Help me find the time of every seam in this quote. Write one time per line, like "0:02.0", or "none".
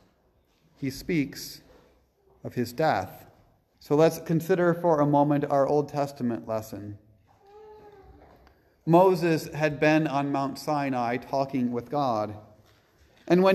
0:03.7

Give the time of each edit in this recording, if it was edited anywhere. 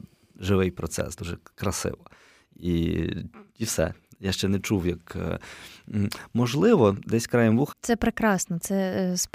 0:01.2
0:07.7

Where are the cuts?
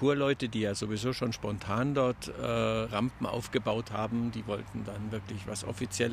0:02.9

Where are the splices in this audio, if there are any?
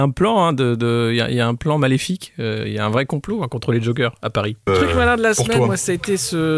0:04.7

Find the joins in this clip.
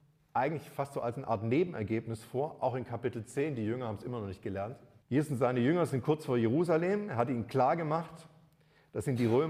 0:05.0

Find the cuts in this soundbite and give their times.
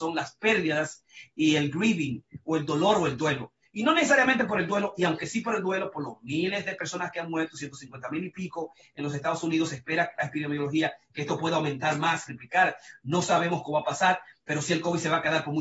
0:12.3

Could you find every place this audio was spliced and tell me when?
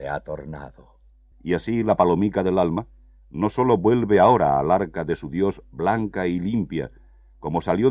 0:01.3

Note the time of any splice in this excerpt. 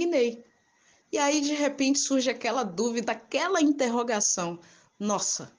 0:01.0
0:03.0

